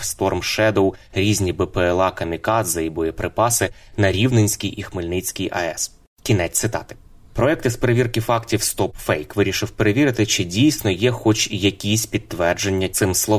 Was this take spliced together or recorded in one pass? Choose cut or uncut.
uncut